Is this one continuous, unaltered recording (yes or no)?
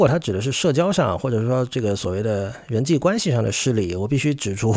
yes